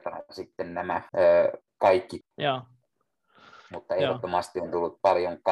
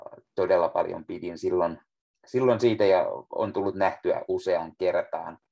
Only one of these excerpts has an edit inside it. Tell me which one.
first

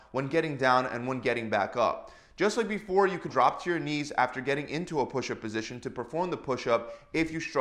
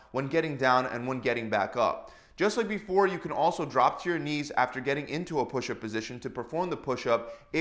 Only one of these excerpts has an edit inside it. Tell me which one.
first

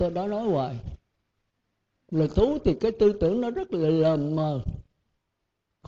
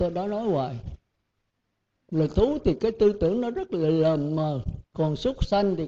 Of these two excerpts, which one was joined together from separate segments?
second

